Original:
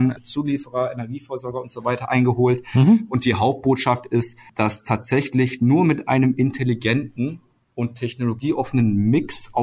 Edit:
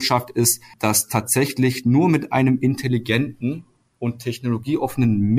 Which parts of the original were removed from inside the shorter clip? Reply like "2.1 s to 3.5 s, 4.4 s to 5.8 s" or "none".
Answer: none